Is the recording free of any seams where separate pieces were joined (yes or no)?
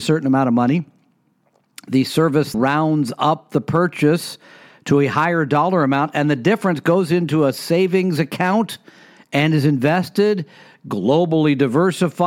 no